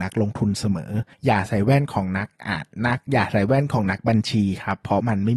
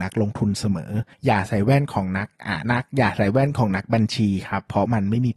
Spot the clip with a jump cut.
second; 1 cut; at 2.6 s

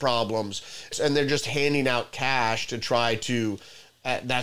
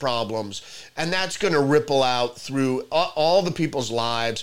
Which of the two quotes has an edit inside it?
first; 1 cut; at 0.9 s

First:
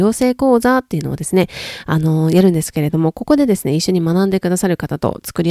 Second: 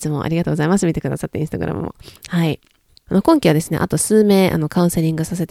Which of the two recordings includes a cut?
second; 1 cut; at 3.1 s

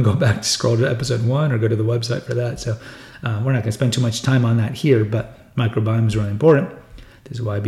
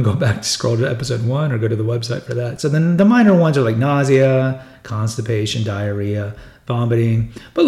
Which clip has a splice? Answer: second; 1 cut; at 2.6 s

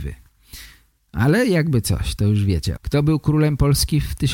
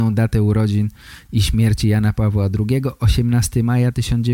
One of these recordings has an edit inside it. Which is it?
first; 2 cuts; at 0.9 s, 2.8 s

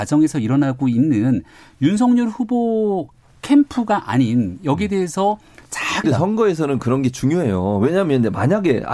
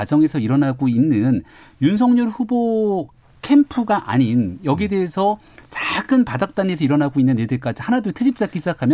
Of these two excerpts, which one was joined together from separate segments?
first; 1 cut; at 6.0 s

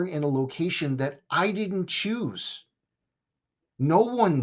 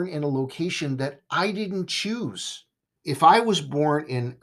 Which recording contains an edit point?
second; 1 cut; at 3.0 s

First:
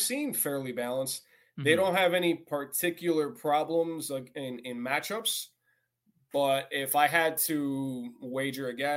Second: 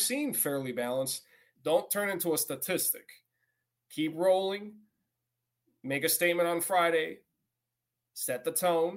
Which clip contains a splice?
second; 1 cut; at 1.6 s

